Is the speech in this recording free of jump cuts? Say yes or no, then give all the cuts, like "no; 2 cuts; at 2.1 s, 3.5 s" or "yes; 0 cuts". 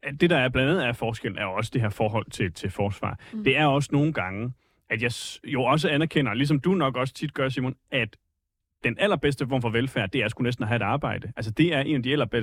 yes; 0 cuts